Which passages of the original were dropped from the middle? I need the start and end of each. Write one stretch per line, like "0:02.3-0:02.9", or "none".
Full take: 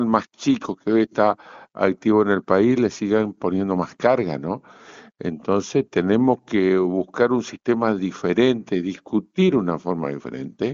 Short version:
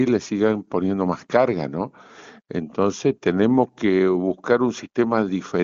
none